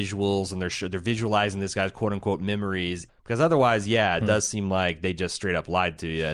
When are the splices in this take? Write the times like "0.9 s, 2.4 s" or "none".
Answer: 3.1 s